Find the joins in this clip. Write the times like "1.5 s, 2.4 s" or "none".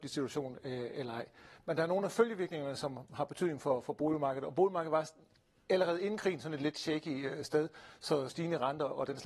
8.3 s